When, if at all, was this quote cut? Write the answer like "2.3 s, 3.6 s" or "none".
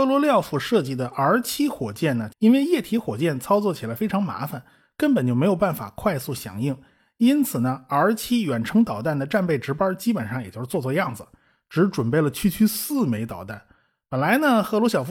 2.3 s